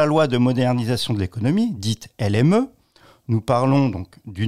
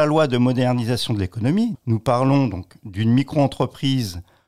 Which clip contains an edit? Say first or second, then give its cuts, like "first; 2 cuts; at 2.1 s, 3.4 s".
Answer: second; 1 cut; at 1.7 s